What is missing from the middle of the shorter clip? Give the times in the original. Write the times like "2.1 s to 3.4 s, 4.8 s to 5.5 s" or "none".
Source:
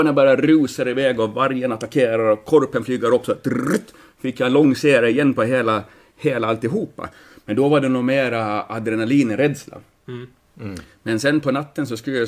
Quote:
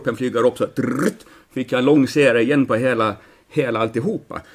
none